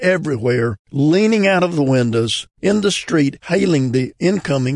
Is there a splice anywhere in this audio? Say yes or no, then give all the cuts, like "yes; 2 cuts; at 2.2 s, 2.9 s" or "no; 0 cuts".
yes; 1 cut; at 2.5 s